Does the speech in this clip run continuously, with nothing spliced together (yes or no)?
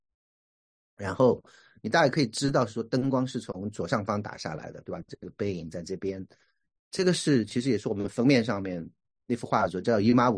no